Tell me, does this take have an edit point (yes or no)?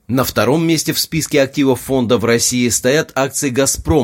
no